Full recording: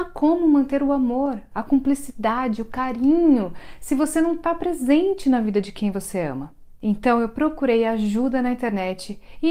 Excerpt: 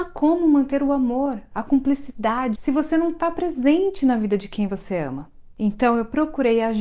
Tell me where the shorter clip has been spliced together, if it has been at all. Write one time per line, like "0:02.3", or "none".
0:02.6